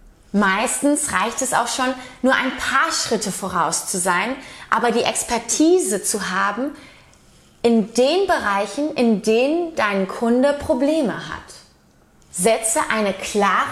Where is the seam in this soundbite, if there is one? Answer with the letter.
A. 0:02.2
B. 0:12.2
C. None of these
B